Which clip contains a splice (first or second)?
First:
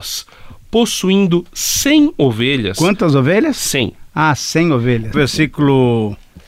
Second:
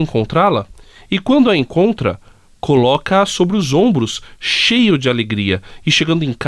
first